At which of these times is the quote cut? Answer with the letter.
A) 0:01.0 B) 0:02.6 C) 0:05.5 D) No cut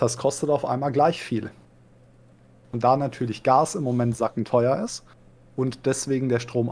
D